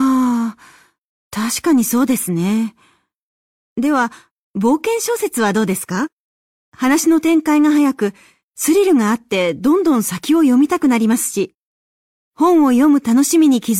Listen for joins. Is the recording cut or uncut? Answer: uncut